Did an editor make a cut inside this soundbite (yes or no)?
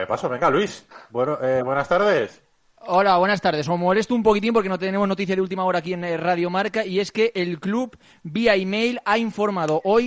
no